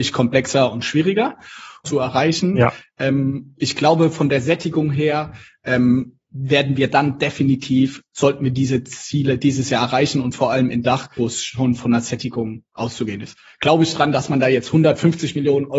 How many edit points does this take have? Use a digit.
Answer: 2